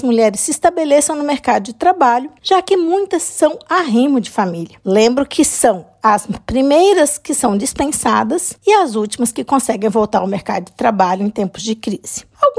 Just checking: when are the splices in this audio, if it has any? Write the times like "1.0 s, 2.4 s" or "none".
4.8 s